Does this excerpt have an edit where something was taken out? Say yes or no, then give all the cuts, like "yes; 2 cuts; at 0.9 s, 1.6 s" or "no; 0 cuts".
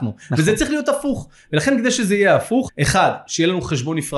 yes; 1 cut; at 2.7 s